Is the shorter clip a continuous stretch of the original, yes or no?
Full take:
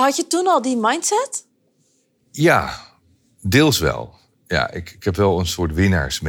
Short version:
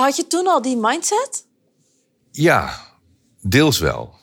yes